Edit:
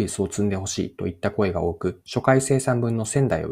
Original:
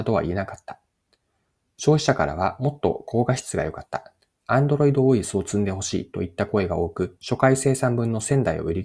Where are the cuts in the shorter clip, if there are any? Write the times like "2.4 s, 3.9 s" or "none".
none